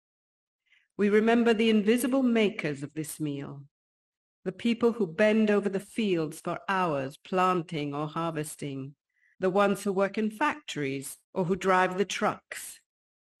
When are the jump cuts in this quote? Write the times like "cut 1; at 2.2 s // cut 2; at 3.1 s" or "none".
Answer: cut 1; at 9.3 s // cut 2; at 11.2 s